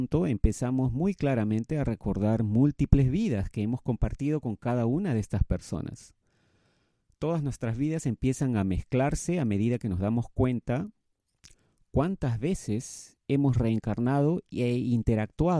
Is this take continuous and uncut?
yes; 0 cuts

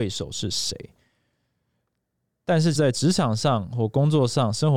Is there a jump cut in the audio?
yes; 1 cut; at 2.7 s

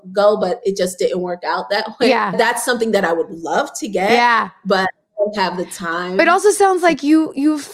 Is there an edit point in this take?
no; 0 cuts

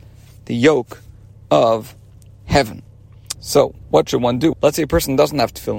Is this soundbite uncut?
no; 2 cuts; at 3.3 s, 4.5 s

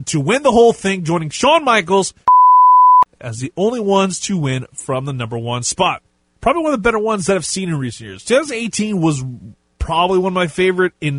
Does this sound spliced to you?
yes; 1 cut; at 6.4 s

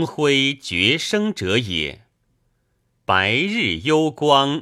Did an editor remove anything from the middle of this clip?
yes; 1 cut; at 3.0 s

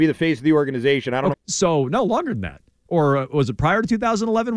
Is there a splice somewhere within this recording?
yes; 2 cuts; at 1.3 s, 2.8 s

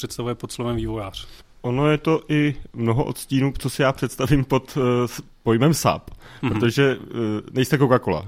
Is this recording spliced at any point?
no; 0 cuts

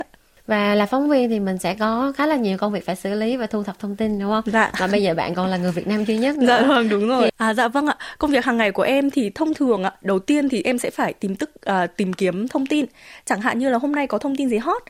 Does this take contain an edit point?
yes; 1 cut; at 7.3 s

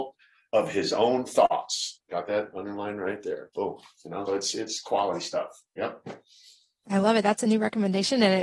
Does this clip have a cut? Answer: yes; 1 cut; at 4.3 s

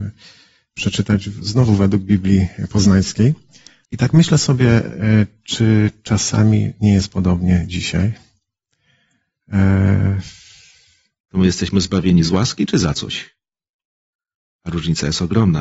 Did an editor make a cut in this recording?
yes; 2 cuts; at 3.8 s, 11.2 s

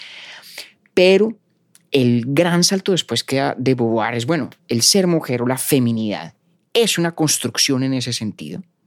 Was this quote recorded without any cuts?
no; 1 cut; at 4.6 s

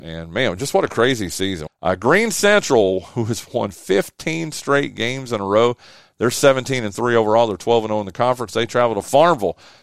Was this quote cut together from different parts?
yes; 1 cut; at 1.7 s

